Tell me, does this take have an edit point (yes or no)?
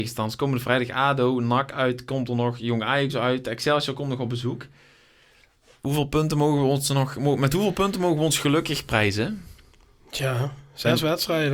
no